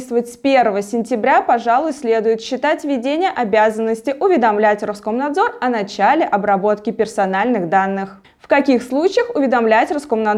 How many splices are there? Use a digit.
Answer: 1